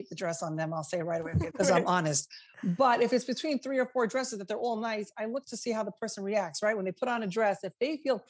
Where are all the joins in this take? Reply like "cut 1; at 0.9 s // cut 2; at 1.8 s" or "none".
cut 1; at 1.5 s